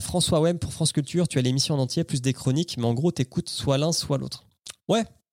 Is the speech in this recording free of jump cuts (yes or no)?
yes